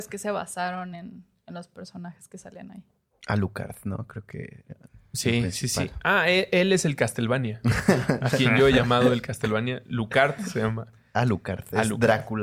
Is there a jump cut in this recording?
no; 0 cuts

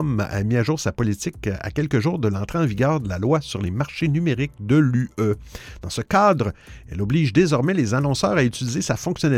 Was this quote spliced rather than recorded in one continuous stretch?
no; 0 cuts

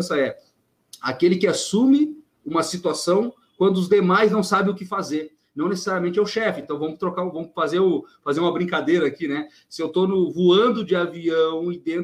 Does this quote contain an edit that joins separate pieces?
no; 0 cuts

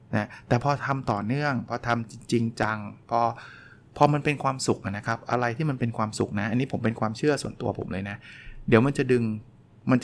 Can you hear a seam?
no; 0 cuts

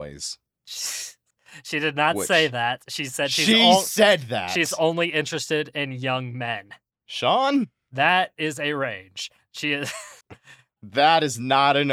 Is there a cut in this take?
yes; 1 cut; at 10.2 s

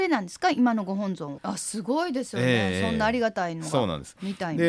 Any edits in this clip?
yes; 1 cut; at 1.4 s

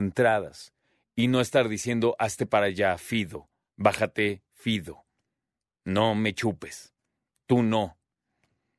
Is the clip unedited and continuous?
yes; 0 cuts

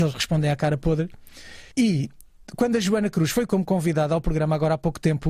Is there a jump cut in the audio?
yes; 1 cut; at 1.7 s

